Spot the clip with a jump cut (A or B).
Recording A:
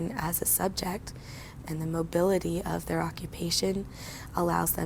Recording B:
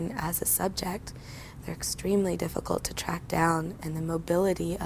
A